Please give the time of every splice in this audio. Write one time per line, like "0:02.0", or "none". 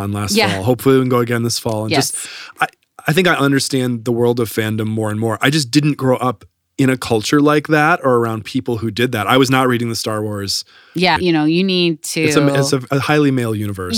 0:11.2